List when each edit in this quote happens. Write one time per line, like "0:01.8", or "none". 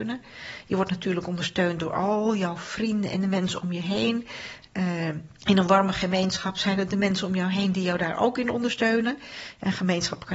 0:05.4